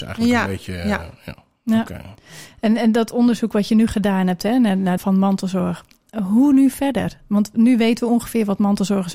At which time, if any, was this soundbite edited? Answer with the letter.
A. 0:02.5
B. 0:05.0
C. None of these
B